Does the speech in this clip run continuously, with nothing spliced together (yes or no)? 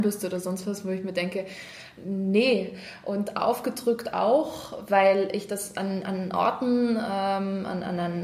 yes